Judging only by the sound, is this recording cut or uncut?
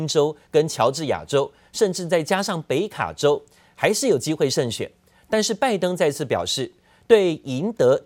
uncut